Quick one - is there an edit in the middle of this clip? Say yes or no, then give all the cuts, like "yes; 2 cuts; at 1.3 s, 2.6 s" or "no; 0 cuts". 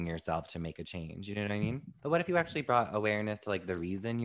yes; 1 cut; at 2.0 s